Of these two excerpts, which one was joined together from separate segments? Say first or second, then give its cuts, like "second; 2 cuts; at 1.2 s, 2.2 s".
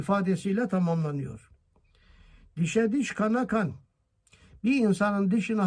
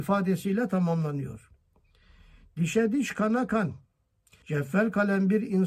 second; 1 cut; at 4.4 s